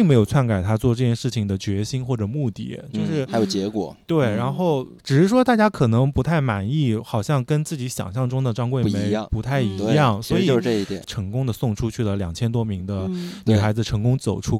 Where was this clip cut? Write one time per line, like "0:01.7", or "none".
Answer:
0:05.0
0:11.0